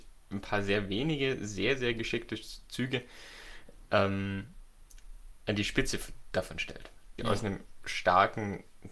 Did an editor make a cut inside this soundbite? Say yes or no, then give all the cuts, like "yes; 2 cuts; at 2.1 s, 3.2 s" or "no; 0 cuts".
yes; 1 cut; at 7.2 s